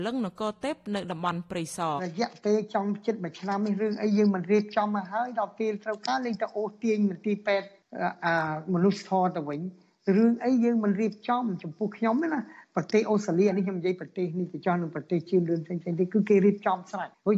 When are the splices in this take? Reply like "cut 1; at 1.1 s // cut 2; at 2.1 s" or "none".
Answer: cut 1; at 2.0 s